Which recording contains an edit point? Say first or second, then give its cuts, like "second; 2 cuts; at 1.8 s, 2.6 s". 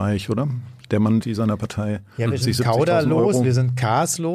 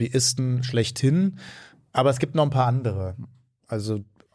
first; 2 cuts; at 1.2 s, 2.4 s